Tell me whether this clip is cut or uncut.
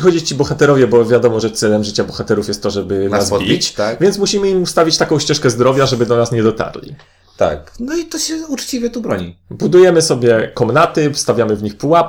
uncut